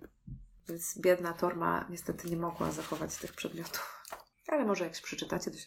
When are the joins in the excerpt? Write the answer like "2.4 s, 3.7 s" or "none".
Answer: 4.3 s